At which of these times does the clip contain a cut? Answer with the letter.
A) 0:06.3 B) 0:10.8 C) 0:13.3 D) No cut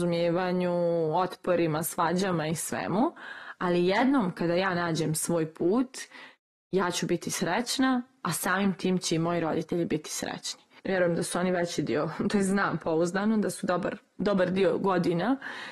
B